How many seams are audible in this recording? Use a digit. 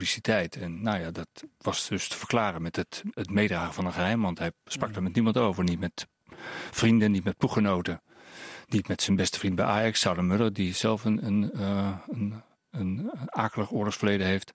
0